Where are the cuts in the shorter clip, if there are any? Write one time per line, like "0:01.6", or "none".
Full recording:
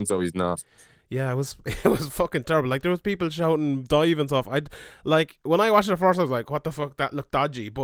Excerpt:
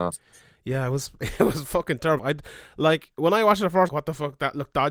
0:02.2
0:03.9